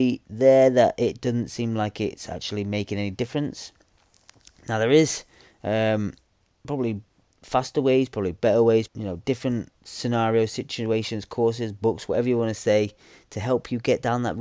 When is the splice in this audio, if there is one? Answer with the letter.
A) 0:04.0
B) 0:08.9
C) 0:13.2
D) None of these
B